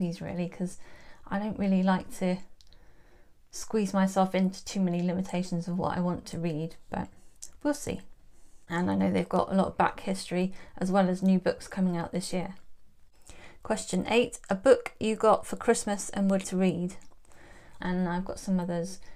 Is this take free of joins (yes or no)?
no